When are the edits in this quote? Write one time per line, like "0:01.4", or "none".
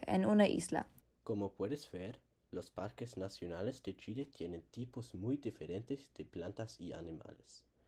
0:01.0